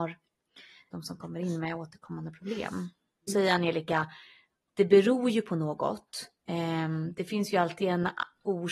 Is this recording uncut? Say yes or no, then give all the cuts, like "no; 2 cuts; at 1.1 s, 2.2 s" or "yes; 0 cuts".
no; 2 cuts; at 0.9 s, 3.3 s